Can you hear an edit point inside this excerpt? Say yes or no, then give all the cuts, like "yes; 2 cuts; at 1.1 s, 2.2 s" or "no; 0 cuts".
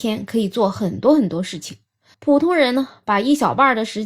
yes; 1 cut; at 2.1 s